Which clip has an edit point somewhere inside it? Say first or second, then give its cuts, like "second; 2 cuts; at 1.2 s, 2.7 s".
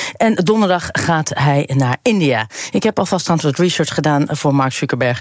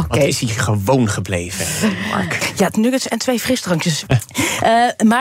second; 2 cuts; at 2.7 s, 4.0 s